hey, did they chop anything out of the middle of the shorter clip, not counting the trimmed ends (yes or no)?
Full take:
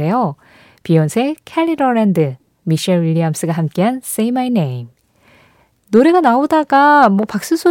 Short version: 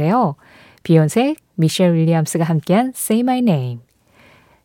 yes